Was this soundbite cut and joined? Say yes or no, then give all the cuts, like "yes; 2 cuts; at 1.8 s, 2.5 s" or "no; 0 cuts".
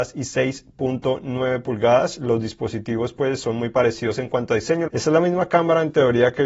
yes; 1 cut; at 4.9 s